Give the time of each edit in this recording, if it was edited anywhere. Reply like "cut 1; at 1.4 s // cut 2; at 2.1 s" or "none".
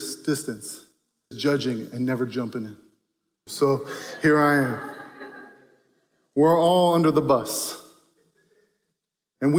cut 1; at 1.3 s // cut 2; at 3.5 s